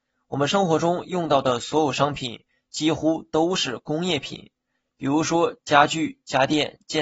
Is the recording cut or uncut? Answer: uncut